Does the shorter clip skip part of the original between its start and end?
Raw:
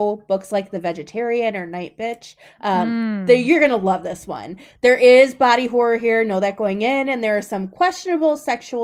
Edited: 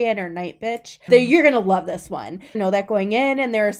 yes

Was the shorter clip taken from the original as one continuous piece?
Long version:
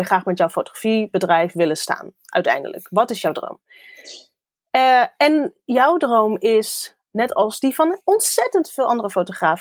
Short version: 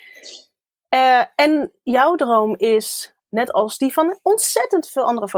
yes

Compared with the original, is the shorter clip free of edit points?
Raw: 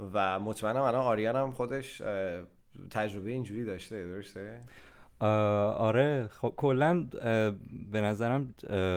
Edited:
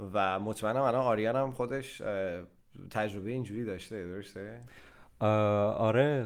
yes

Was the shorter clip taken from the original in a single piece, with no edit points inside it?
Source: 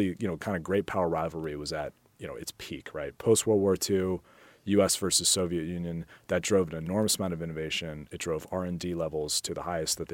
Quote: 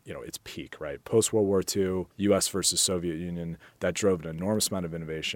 no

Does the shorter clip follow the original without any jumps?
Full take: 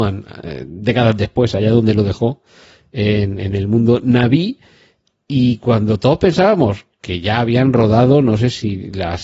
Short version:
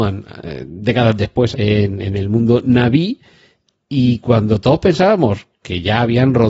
no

